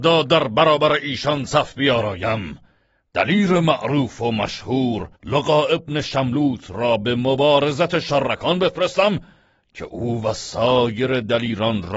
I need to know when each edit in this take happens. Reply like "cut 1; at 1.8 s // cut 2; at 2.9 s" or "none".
cut 1; at 5.2 s